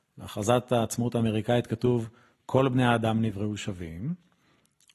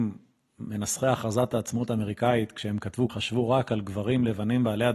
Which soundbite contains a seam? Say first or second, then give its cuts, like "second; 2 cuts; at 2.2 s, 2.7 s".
second; 1 cut; at 3.1 s